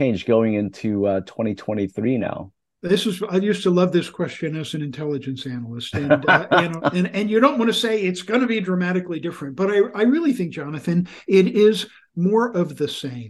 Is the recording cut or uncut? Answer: uncut